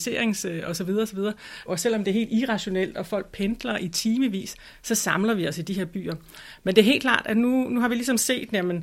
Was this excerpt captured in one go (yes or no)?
no